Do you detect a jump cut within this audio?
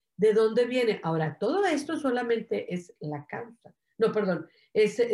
no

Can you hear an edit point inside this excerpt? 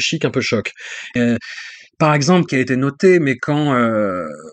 yes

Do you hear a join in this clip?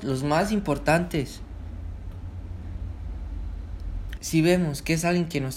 yes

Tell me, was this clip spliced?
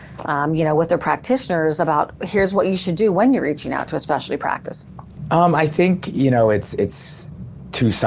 no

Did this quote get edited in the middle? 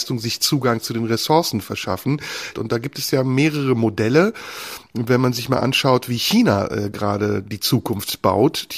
yes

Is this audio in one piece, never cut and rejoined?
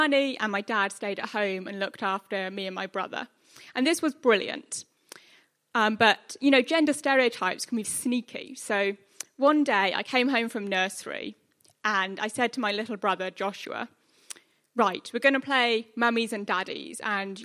no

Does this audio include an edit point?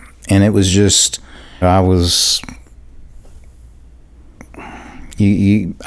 yes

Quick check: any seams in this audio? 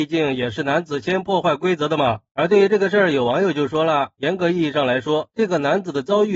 no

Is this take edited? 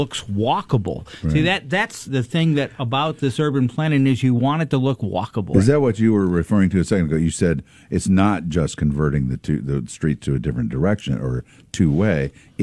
yes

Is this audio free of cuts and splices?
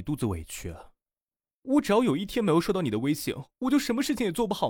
no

